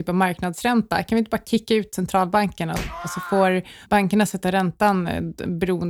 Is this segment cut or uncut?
uncut